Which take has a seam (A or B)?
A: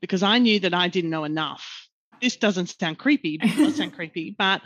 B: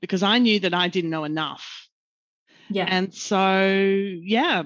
A